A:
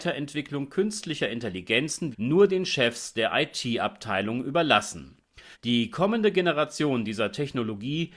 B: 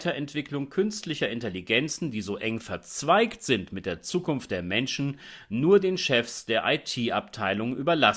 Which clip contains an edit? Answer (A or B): A